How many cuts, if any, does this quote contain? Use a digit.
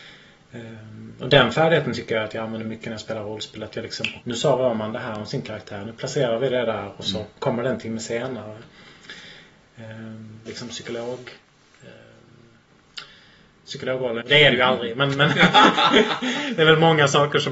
3